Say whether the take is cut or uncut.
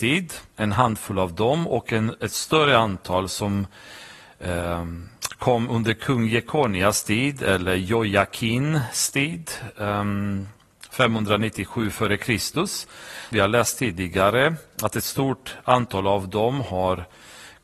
cut